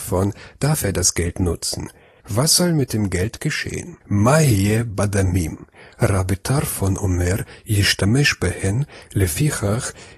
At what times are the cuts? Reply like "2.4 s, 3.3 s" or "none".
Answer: 2.2 s, 4.0 s